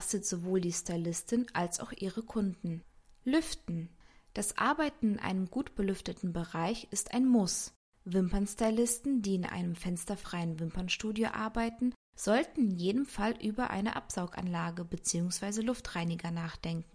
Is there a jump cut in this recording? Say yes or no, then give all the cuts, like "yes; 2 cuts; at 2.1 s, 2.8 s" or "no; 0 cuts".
no; 0 cuts